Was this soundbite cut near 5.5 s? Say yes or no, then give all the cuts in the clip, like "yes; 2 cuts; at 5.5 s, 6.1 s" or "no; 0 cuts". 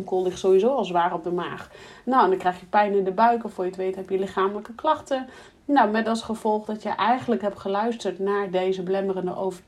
no; 0 cuts